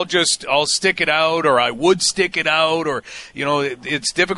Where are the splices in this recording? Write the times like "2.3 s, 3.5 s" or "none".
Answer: none